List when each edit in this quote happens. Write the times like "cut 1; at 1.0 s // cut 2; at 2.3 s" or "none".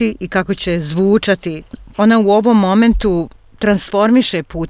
cut 1; at 1.9 s